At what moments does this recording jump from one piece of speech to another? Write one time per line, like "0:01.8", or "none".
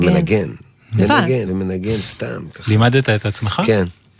0:01.5